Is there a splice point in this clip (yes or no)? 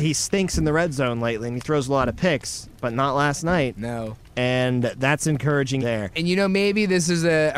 yes